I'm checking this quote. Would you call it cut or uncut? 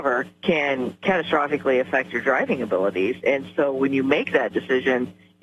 uncut